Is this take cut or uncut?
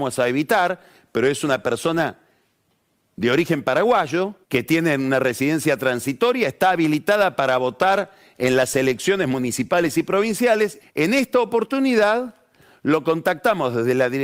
cut